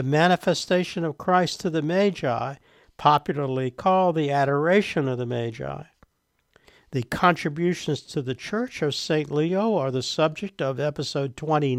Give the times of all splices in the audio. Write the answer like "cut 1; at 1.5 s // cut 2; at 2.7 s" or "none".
none